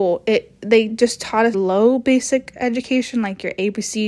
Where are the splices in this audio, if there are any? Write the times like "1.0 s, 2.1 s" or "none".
1.5 s

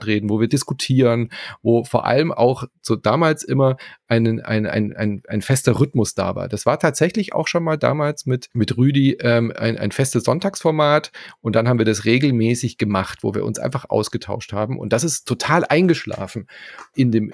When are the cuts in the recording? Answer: 8.5 s

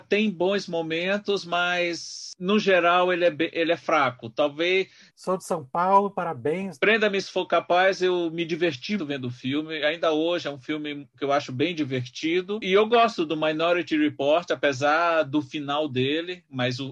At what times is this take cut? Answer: 5.1 s, 6.8 s, 9.0 s

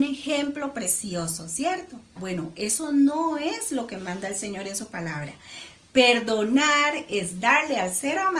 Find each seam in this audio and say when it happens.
2.2 s

